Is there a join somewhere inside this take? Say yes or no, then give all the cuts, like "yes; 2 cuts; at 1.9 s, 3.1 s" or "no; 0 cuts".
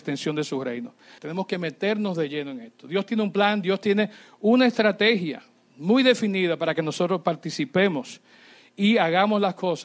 yes; 1 cut; at 1.2 s